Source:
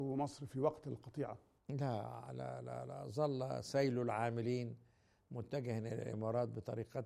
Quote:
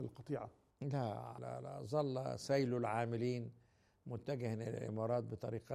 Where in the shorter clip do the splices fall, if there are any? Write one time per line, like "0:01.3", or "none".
0:01.4